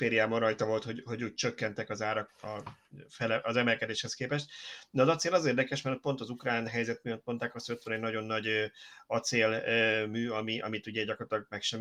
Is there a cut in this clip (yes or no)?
yes